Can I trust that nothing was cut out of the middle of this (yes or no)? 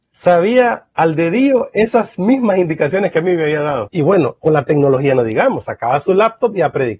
no